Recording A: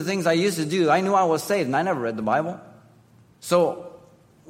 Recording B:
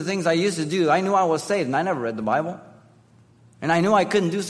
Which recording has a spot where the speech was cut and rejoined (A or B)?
A